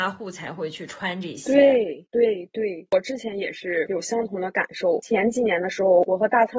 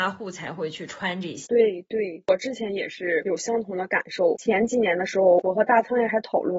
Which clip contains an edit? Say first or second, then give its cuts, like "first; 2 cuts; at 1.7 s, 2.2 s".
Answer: second; 1 cut; at 1.4 s